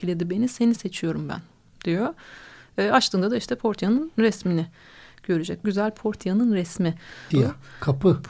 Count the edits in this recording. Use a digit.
2